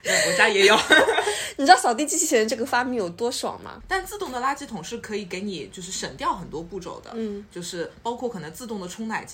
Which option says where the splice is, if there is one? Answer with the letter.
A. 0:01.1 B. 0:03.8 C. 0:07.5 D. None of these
B